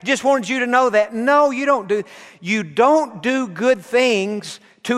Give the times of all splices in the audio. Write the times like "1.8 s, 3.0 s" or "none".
none

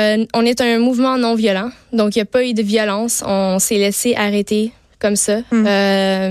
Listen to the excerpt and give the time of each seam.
none

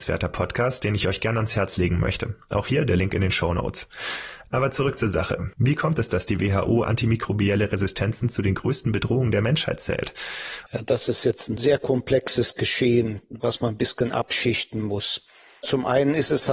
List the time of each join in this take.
5.5 s, 10.7 s

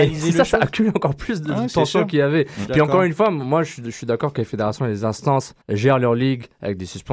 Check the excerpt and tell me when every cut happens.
5.6 s

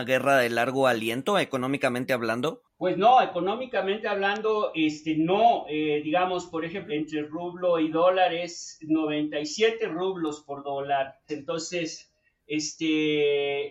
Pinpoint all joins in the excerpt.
6.9 s, 11.3 s

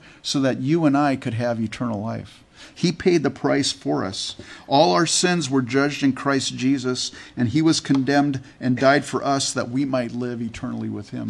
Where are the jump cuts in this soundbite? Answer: none

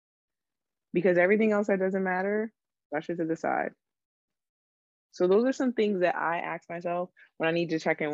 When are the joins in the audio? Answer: none

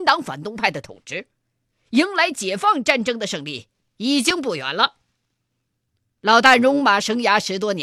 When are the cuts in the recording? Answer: none

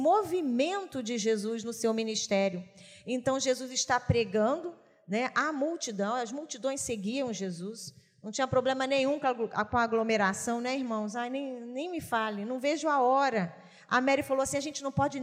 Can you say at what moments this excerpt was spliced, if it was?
none

